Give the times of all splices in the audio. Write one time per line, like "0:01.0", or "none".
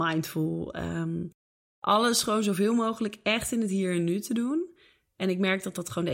none